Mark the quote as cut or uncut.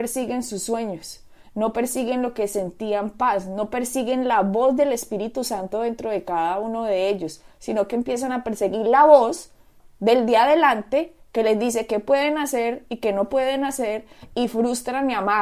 uncut